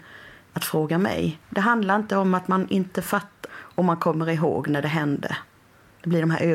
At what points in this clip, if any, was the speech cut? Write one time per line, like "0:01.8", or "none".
0:01.4
0:03.5